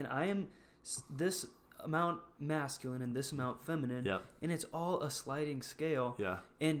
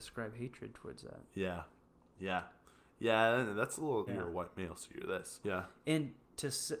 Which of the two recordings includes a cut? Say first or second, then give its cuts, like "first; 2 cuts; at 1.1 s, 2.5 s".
second; 2 cuts; at 4.1 s, 5.4 s